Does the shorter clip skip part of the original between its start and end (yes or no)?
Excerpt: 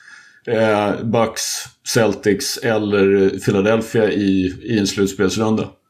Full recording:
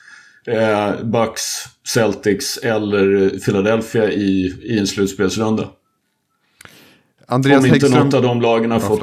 no